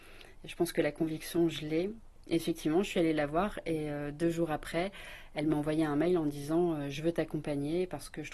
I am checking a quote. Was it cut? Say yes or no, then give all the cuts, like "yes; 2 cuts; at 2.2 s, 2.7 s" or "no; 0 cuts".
yes; 1 cut; at 2.2 s